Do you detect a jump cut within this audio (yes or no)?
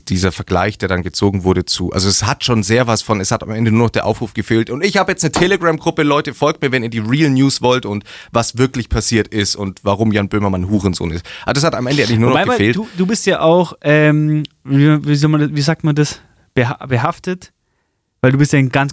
no